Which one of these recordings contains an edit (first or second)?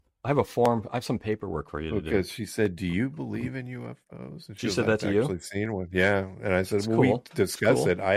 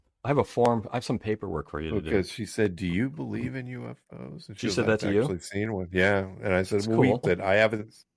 second